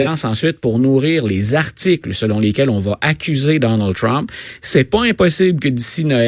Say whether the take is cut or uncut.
uncut